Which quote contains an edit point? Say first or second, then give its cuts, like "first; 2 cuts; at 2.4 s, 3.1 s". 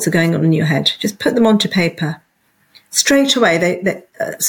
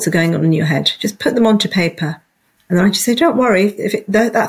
second; 1 cut; at 2.6 s